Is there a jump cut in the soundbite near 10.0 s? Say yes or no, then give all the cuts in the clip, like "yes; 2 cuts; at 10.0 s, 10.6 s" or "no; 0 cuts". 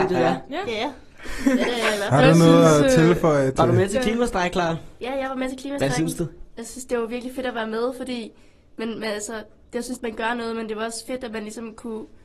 yes; 1 cut; at 10.0 s